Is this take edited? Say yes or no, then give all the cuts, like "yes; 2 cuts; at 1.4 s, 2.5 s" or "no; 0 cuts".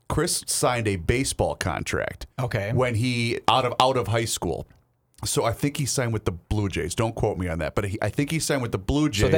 yes; 1 cut; at 2.3 s